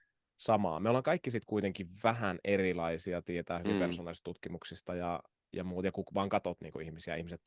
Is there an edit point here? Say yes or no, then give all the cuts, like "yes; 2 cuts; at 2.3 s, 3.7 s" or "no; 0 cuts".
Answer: no; 0 cuts